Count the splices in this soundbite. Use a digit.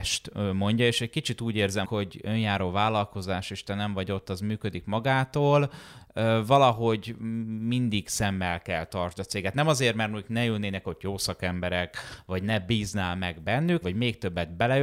2